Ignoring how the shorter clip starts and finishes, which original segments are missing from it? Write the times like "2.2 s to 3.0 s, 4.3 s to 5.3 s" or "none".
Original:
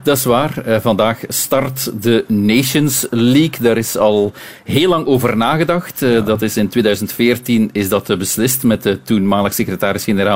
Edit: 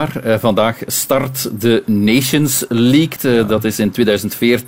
3.6 s to 5.9 s